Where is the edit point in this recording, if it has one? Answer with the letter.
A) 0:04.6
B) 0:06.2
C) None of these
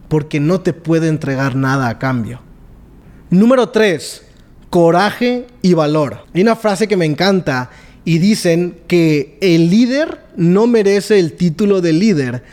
B